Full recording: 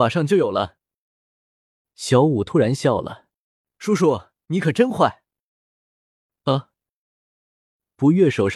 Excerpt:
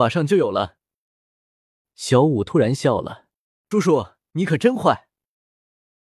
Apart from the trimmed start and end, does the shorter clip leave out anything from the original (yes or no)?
yes